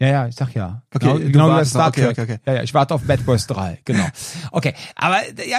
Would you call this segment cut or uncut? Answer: uncut